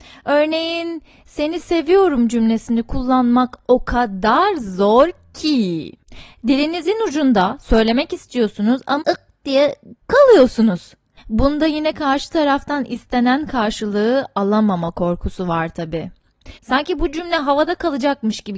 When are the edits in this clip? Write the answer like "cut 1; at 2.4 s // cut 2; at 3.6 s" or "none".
cut 1; at 9.0 s // cut 2; at 11.2 s // cut 3; at 16.6 s